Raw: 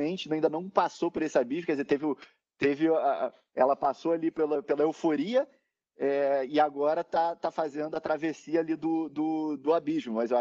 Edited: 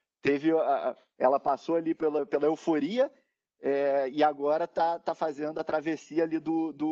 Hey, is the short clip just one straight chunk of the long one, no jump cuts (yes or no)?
yes